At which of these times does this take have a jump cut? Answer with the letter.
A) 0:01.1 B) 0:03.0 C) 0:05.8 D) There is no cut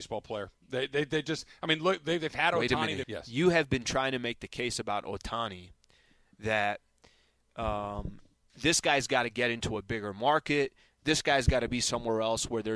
B